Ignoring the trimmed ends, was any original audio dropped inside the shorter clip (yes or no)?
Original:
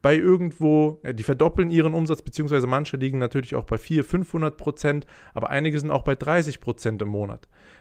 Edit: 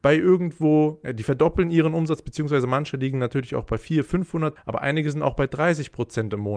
yes